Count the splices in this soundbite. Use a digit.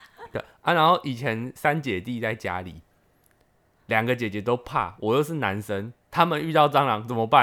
0